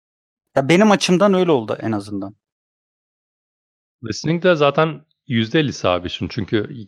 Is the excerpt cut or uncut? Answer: uncut